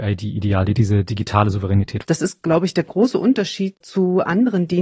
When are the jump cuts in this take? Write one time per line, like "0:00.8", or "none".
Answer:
0:02.0